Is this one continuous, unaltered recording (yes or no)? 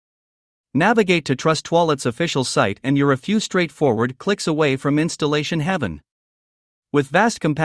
yes